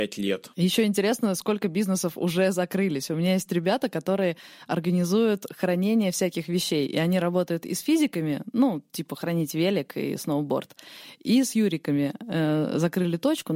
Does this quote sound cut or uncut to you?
uncut